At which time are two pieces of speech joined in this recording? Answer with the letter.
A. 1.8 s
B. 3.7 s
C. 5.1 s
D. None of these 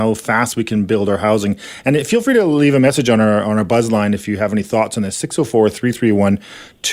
D